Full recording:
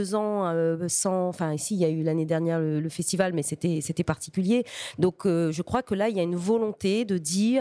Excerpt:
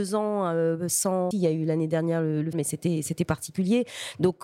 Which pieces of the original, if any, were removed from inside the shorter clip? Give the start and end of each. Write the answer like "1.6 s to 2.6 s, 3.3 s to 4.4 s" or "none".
1.3 s to 1.7 s, 2.9 s to 3.3 s